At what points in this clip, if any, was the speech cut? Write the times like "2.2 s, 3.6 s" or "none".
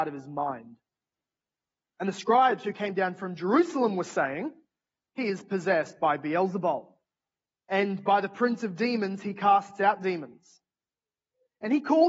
none